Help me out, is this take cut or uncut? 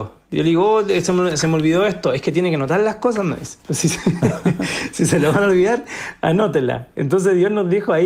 cut